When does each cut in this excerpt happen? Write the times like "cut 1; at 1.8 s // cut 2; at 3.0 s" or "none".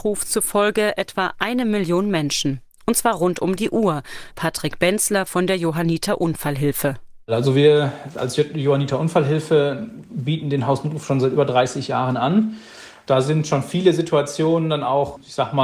cut 1; at 4.3 s